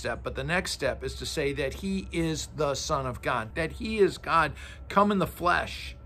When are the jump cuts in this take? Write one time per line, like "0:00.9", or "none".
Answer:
0:03.5